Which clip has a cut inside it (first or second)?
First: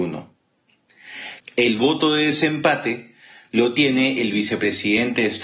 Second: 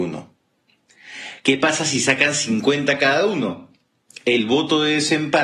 first